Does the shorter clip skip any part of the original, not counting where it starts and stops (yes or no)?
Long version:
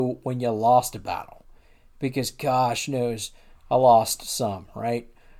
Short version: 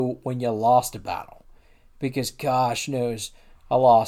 no